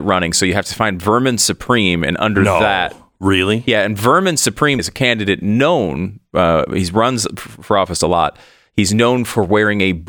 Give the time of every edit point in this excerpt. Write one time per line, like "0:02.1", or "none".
0:04.8